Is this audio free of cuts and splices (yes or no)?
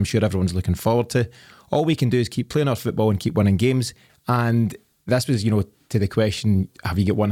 no